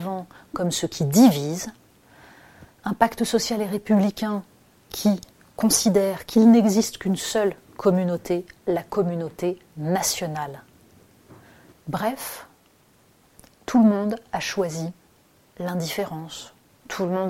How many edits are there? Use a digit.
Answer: 1